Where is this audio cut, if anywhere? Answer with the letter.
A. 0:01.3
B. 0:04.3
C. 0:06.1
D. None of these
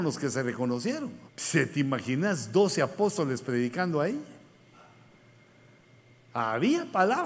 A